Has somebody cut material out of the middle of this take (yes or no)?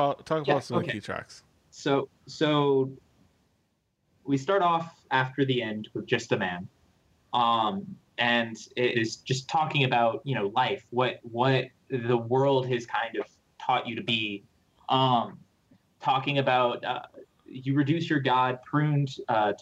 yes